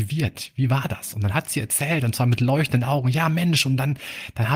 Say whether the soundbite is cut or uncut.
uncut